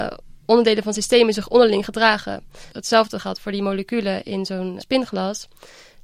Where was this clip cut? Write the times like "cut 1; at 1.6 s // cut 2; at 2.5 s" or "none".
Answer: cut 1; at 2.7 s // cut 2; at 4.8 s